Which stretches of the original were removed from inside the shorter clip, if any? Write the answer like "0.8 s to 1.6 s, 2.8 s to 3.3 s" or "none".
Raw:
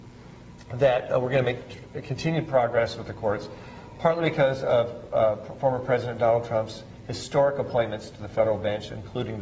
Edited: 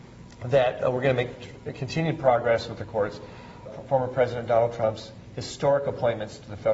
3.9 s to 5.4 s